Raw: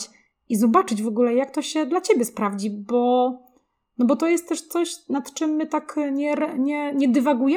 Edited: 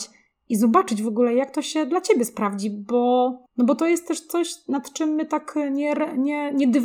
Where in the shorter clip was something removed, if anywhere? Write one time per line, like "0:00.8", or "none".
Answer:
0:03.5